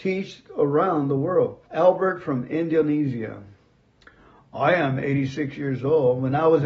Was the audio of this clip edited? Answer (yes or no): yes